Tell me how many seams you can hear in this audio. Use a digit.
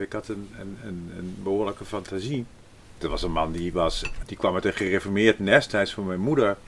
2